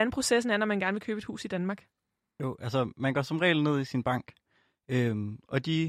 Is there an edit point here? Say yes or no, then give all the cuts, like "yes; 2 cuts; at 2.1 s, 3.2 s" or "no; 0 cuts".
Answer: no; 0 cuts